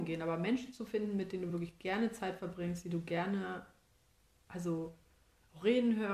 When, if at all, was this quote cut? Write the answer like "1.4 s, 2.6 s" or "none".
none